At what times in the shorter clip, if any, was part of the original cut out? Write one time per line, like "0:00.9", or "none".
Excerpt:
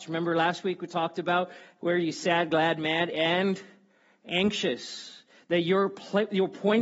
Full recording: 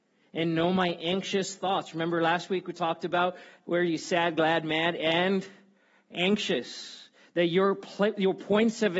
none